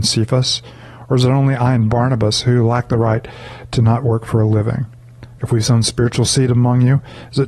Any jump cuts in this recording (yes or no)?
yes